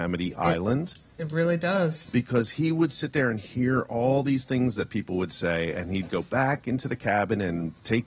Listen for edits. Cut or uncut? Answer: uncut